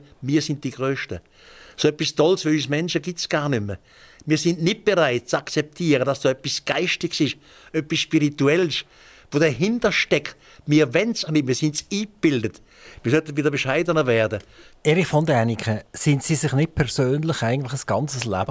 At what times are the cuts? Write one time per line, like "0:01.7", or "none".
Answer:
0:11.3
0:14.7
0:15.9